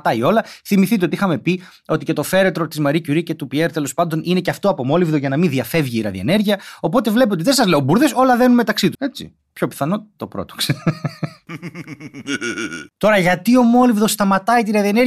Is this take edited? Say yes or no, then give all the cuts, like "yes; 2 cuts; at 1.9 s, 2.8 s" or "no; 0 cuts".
yes; 1 cut; at 8.9 s